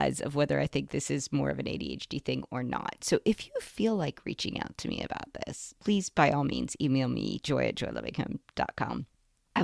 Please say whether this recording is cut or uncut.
uncut